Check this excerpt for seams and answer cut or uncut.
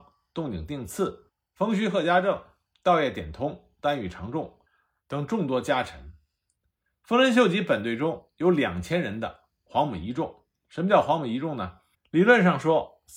cut